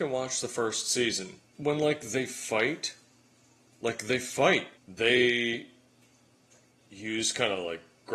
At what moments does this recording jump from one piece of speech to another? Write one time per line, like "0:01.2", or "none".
0:01.4
0:04.8